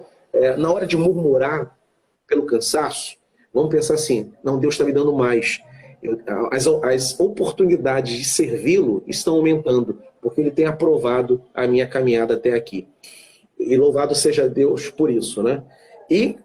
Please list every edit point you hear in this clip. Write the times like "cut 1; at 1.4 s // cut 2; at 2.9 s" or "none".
none